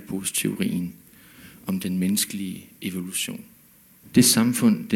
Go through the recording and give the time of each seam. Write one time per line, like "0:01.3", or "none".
0:04.0